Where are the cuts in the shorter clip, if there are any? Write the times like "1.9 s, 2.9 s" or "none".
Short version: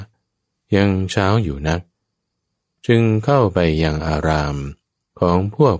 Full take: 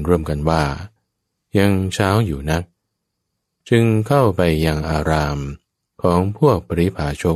none